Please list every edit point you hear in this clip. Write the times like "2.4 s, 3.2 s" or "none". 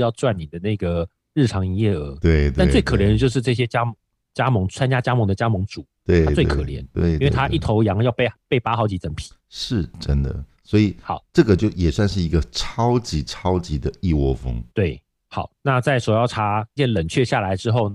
14.7 s, 16.8 s

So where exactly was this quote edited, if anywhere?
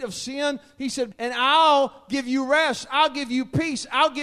1.1 s

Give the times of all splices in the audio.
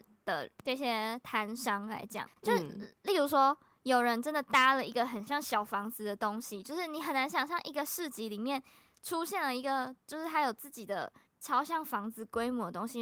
2.3 s

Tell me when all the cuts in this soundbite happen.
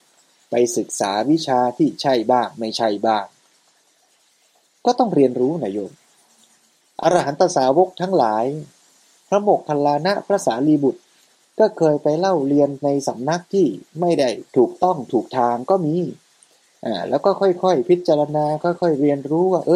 14.5 s

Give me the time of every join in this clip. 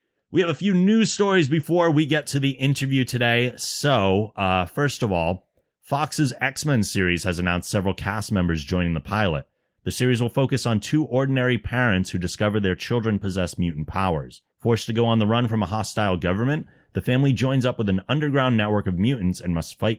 14.5 s

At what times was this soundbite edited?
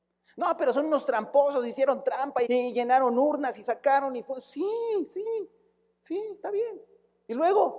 2.5 s

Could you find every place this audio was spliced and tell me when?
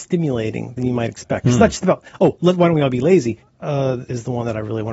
3.4 s

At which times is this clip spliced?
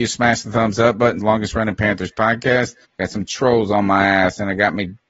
1.2 s, 2.9 s

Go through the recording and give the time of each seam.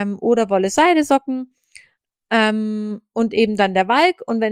none

